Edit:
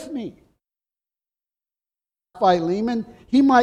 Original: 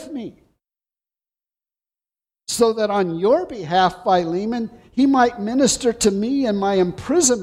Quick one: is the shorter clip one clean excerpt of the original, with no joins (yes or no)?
no